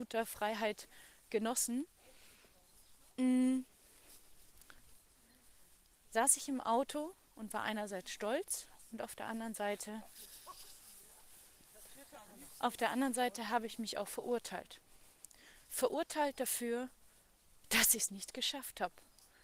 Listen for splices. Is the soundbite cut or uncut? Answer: uncut